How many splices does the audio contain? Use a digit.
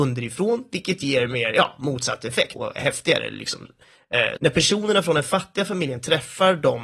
2